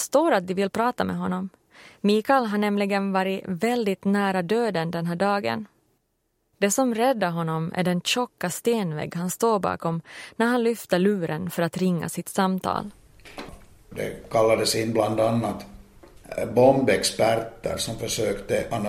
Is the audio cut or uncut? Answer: uncut